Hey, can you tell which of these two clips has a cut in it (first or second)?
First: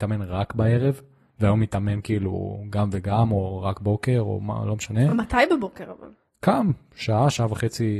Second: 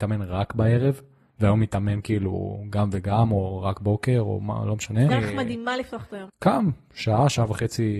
second